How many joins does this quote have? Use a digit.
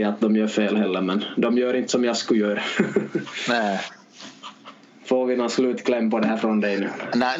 0